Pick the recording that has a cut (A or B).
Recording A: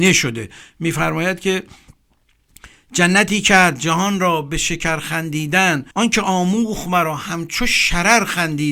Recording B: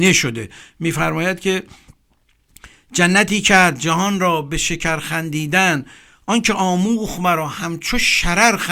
A